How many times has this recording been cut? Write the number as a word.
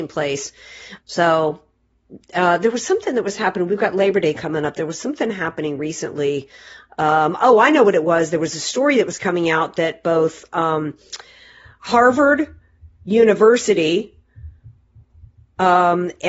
one